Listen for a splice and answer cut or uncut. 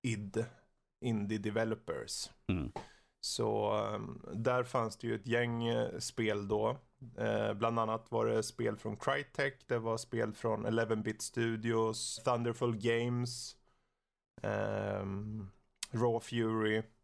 cut